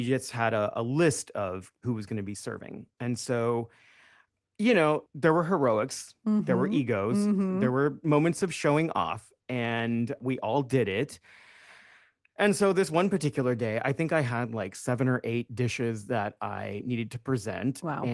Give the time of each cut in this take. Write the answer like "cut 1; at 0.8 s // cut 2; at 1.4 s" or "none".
none